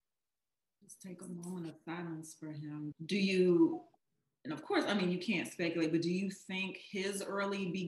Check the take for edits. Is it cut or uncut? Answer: uncut